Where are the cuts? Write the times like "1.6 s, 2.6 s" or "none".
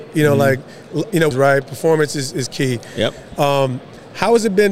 1.3 s